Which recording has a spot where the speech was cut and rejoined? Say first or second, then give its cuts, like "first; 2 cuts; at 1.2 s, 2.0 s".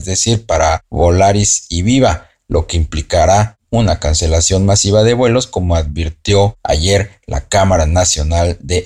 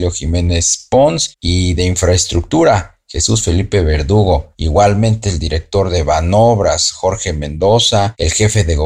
second; 1 cut; at 4.5 s